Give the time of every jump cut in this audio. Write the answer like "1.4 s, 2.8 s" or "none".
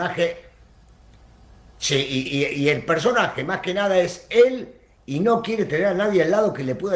none